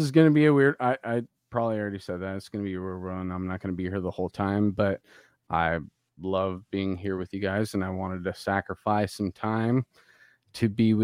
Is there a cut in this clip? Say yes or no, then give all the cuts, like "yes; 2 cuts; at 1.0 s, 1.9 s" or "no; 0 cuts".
no; 0 cuts